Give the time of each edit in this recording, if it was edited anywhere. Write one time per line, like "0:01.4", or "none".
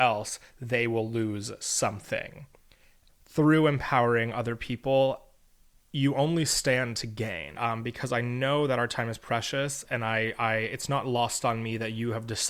0:03.1
0:07.6
0:09.8